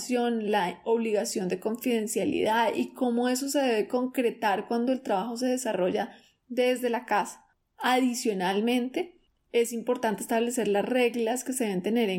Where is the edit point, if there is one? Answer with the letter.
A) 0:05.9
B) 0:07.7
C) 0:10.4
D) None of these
D